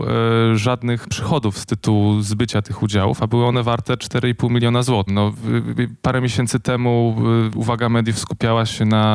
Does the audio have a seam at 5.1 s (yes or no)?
yes